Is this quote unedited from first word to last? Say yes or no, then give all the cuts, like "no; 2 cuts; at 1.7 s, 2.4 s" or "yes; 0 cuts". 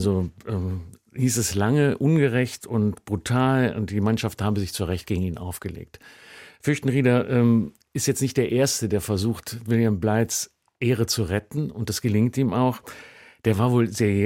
yes; 0 cuts